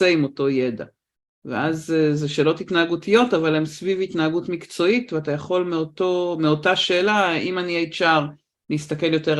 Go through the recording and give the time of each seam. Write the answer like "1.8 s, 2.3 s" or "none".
none